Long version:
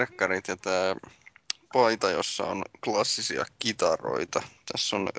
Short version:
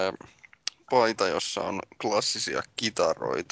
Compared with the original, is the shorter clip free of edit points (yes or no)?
yes